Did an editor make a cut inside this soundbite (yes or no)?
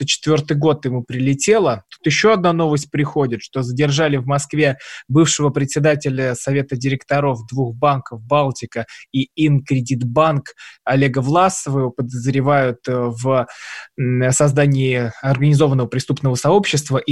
no